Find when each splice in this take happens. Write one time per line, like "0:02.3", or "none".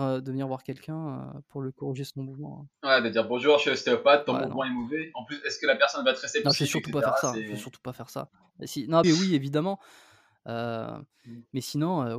0:09.0